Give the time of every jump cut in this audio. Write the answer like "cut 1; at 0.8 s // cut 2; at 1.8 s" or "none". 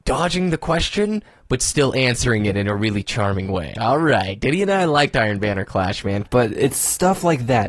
cut 1; at 3.8 s // cut 2; at 6.2 s